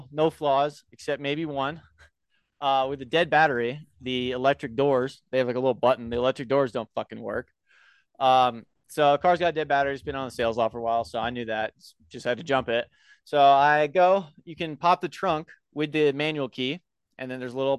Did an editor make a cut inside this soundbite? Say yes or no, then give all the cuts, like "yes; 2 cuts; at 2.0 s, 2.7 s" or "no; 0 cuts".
no; 0 cuts